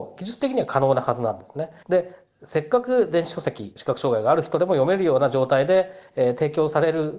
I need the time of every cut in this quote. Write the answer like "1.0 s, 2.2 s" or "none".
1.8 s, 3.8 s